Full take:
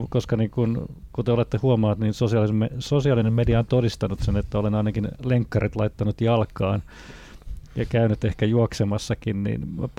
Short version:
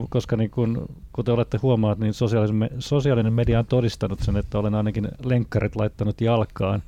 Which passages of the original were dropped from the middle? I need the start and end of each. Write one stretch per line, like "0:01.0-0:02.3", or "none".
none

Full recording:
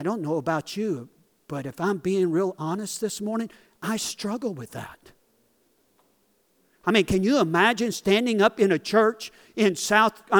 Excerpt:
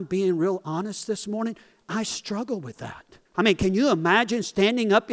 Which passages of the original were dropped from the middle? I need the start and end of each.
0:05.2-0:06.7

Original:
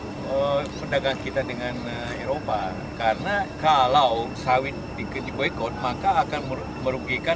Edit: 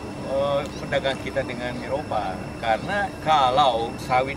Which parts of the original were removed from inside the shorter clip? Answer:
0:01.8-0:02.2

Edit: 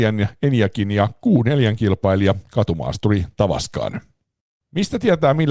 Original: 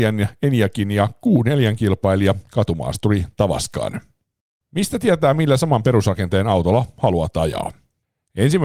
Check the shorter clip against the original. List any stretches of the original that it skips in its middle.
none

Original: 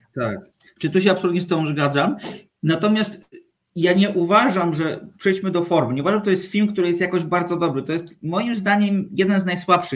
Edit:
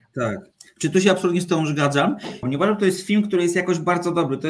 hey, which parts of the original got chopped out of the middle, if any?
0:02.4-0:05.9

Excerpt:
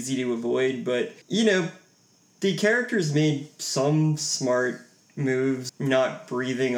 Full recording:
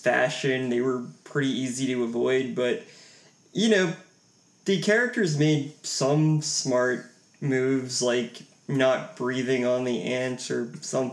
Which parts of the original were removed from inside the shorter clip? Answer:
0:02.9-0:03.5
0:07.9-0:08.6

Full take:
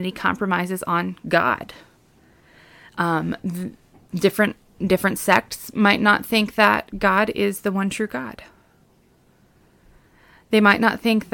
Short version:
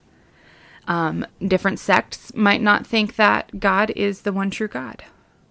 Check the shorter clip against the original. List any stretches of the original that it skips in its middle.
0:03.4-0:04.7

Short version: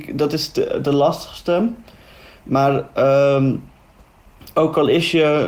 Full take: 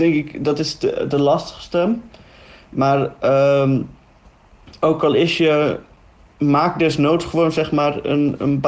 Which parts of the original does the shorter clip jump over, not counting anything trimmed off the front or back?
none

